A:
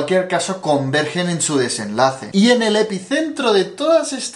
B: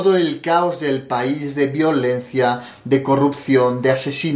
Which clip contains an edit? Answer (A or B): A